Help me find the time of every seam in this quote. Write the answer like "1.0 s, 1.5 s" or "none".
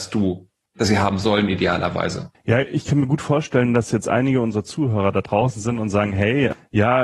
2.3 s